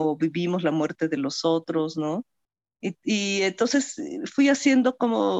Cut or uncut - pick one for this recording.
uncut